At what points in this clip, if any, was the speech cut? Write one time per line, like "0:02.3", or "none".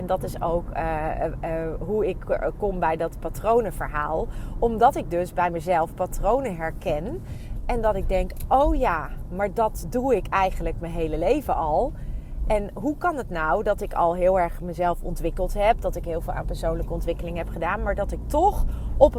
none